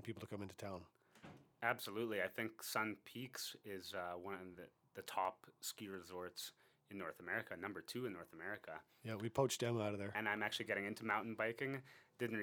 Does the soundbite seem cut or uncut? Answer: cut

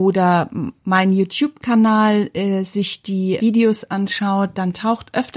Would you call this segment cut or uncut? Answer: cut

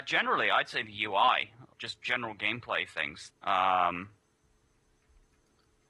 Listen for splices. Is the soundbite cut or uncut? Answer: cut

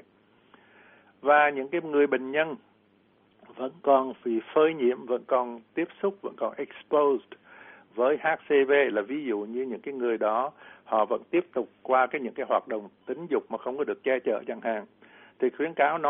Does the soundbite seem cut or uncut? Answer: uncut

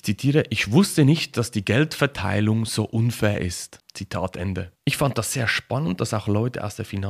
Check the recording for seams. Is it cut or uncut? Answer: uncut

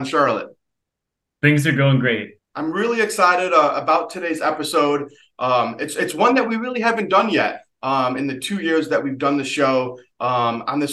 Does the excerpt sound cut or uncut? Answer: cut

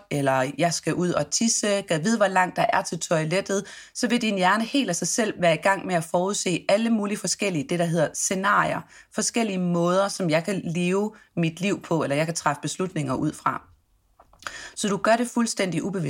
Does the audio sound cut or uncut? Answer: uncut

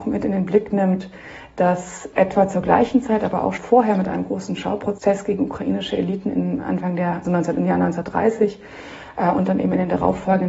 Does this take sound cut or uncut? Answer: cut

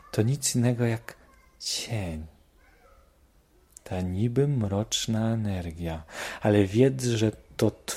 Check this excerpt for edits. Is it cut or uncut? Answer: uncut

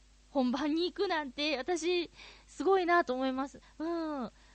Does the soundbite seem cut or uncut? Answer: cut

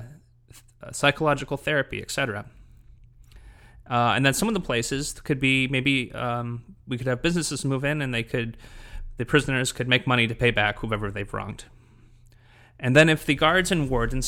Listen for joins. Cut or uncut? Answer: uncut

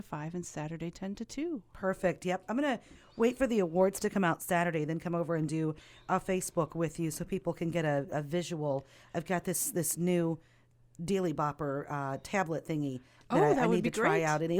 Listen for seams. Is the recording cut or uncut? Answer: uncut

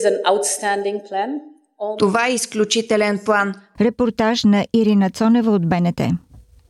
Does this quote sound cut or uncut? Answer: cut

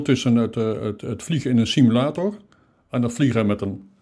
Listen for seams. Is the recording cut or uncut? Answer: uncut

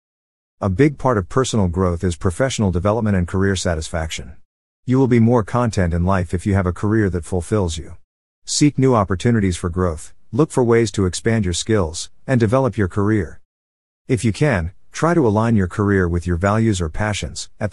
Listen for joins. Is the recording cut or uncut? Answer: uncut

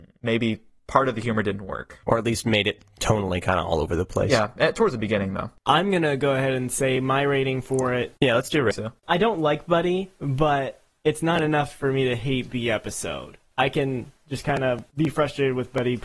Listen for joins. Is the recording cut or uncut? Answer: cut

